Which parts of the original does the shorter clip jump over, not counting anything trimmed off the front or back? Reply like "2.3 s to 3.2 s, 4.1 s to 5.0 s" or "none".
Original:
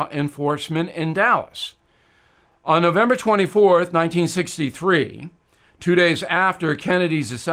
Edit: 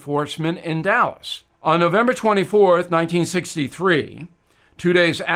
1.8 s to 2.6 s